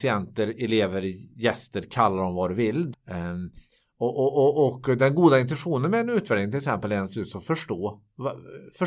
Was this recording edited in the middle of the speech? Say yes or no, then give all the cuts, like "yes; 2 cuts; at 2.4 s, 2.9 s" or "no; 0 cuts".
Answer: yes; 1 cut; at 2.9 s